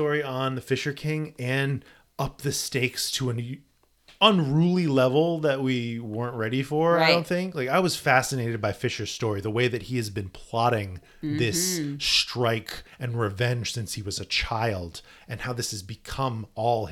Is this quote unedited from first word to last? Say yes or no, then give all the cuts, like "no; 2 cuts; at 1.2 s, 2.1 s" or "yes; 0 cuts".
yes; 0 cuts